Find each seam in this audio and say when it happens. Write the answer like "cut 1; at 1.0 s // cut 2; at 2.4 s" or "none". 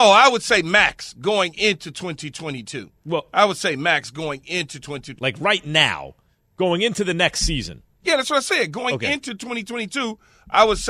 cut 1; at 5.2 s